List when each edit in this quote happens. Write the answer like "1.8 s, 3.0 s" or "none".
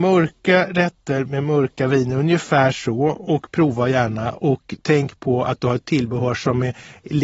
none